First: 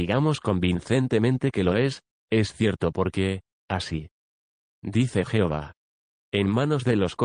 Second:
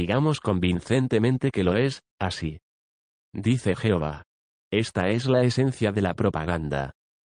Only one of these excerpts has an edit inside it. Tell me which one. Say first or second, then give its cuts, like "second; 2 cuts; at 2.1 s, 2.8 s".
second; 2 cuts; at 2.1 s, 4.6 s